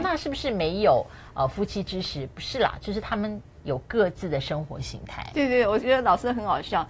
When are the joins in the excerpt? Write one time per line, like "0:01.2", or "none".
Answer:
none